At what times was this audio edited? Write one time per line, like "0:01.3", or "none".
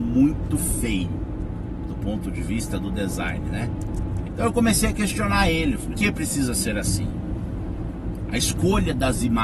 0:04.3
0:05.9